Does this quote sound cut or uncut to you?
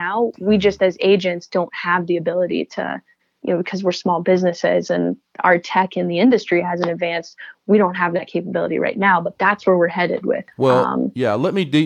uncut